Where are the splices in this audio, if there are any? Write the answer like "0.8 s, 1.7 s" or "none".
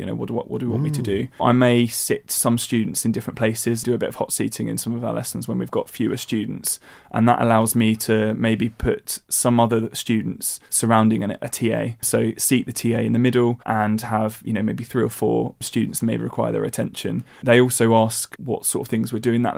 13.6 s